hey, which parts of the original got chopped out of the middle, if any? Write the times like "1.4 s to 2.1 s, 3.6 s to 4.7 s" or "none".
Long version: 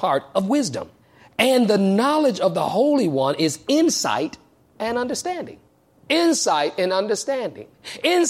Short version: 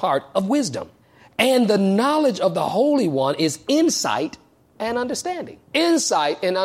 5.6 s to 6.0 s